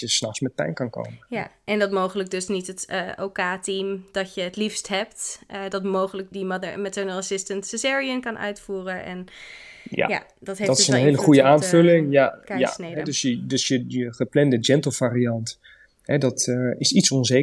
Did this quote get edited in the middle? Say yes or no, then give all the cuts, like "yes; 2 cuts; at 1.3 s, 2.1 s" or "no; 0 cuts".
yes; 1 cut; at 6.3 s